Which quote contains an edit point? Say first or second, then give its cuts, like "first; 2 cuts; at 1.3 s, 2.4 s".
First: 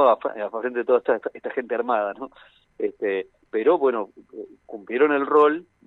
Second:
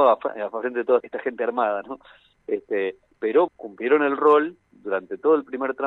second; 2 cuts; at 1.0 s, 3.5 s